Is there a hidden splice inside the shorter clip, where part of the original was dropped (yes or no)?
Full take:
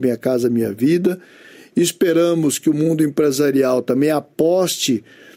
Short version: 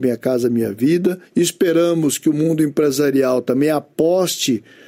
yes